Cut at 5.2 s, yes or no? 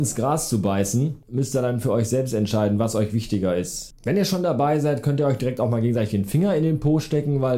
no